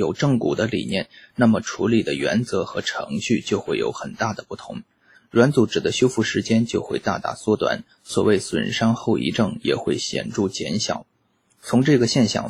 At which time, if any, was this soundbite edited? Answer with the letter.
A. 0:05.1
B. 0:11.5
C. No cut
A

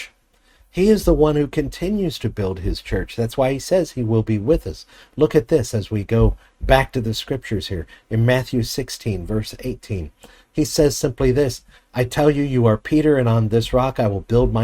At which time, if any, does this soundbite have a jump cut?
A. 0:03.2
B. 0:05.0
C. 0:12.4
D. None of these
D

